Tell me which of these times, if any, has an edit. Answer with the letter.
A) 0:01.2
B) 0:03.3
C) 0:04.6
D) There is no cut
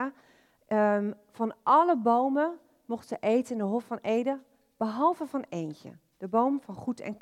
D